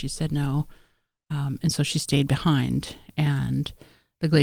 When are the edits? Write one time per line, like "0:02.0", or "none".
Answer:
none